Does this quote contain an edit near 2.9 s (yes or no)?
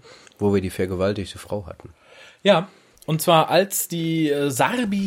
yes